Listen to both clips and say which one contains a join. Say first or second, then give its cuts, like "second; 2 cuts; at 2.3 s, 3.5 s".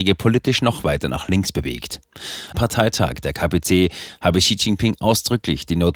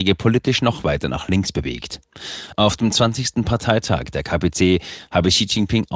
first; 1 cut; at 2.5 s